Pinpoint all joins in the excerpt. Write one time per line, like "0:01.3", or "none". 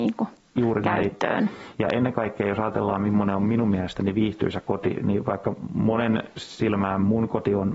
none